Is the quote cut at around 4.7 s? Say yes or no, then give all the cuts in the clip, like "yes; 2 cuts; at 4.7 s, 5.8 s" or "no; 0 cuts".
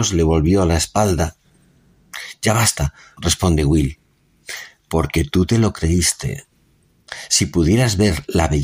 no; 1 cut; at 3.2 s